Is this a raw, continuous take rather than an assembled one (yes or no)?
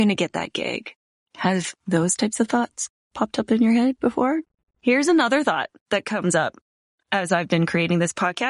no